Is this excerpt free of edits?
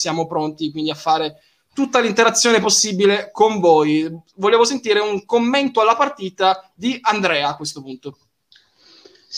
yes; 0 cuts

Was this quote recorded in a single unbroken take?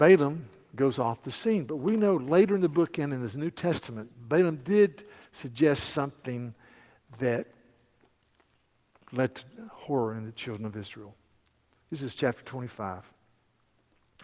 yes; 0 cuts

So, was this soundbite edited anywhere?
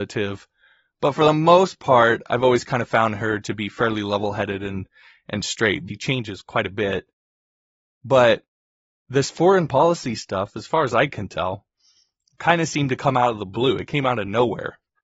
yes; 1 cut; at 5.9 s

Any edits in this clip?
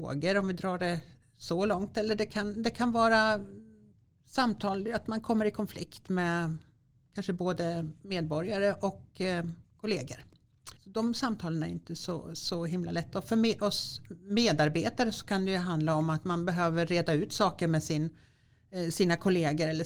yes; 2 cuts; at 9.6 s, 10.8 s

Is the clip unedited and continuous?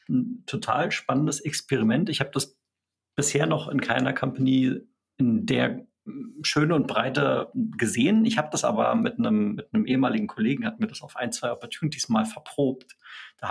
yes; 0 cuts

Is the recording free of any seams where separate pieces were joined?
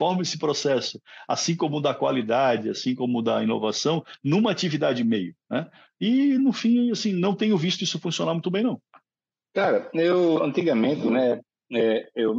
yes; 0 cuts

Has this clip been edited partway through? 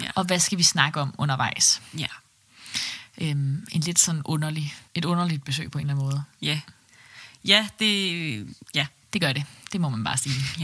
yes; 2 cuts; at 4.9 s, 9.0 s

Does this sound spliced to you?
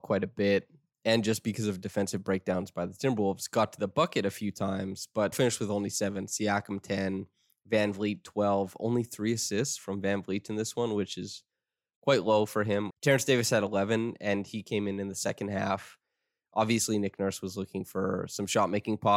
yes; 2 cuts; at 5.3 s, 12.9 s

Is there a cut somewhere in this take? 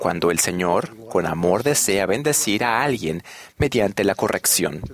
no; 0 cuts

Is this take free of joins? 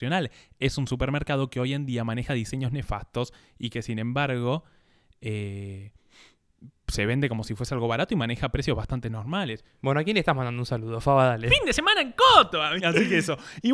no; 1 cut; at 12.8 s

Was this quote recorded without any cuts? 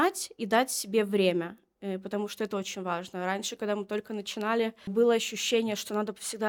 yes; 0 cuts

